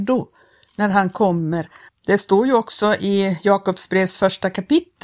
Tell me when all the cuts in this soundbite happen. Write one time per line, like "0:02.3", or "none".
0:01.9